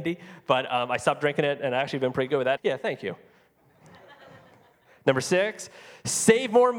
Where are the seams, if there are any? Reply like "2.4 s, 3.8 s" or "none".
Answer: 2.6 s